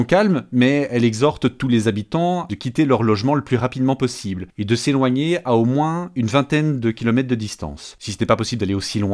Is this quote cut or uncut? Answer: uncut